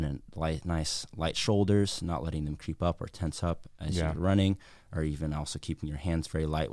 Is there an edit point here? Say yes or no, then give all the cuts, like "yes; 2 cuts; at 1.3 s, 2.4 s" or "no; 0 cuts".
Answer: no; 0 cuts